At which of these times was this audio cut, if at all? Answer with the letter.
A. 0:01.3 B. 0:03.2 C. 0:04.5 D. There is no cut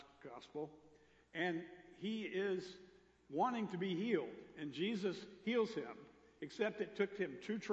D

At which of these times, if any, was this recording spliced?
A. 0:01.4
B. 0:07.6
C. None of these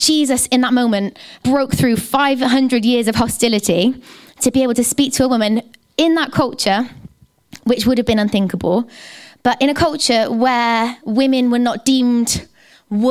A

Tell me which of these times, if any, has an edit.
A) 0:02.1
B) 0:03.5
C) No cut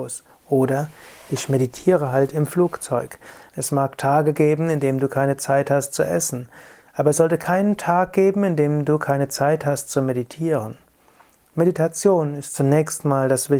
B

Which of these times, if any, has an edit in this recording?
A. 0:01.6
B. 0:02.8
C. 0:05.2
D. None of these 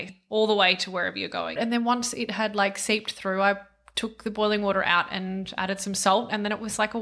A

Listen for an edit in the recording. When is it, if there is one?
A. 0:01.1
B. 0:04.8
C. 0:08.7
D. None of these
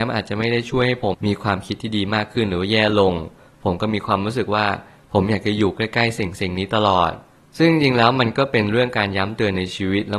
A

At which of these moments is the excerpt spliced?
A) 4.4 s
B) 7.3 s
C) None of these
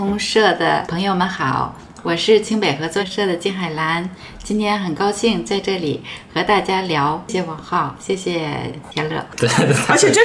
B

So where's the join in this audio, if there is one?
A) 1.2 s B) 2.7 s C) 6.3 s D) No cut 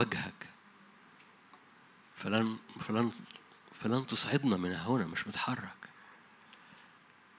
D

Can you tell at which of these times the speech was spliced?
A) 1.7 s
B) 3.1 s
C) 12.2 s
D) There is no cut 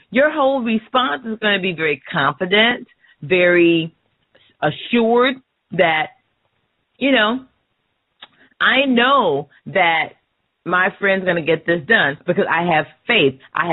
C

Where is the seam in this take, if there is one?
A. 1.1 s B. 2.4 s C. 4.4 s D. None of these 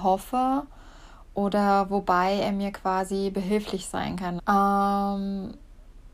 C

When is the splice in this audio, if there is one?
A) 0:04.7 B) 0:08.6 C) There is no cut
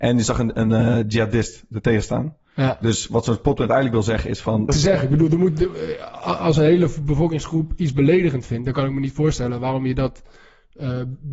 A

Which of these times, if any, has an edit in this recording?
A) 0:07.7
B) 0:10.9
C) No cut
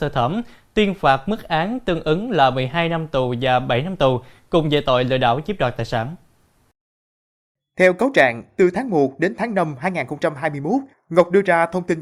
B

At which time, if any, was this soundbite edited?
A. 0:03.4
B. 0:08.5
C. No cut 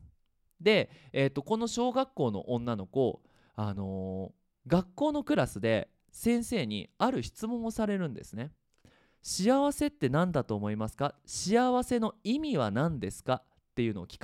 C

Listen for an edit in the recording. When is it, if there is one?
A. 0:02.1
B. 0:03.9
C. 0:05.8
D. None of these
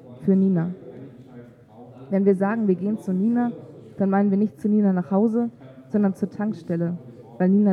D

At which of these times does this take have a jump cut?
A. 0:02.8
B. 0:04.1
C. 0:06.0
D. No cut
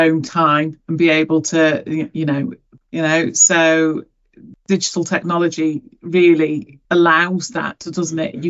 A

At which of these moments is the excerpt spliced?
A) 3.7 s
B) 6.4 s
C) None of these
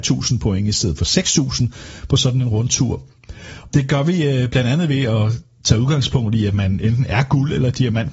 A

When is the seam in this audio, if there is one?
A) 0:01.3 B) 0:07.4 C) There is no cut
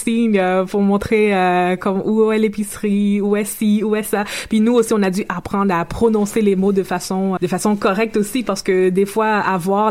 B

